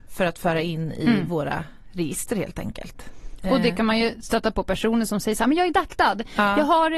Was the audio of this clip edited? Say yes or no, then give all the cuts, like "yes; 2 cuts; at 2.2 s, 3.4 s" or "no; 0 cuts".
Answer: no; 0 cuts